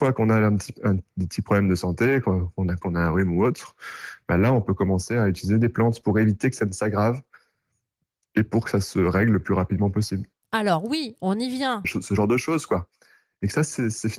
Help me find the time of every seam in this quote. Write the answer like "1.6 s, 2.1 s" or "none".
2.8 s, 11.8 s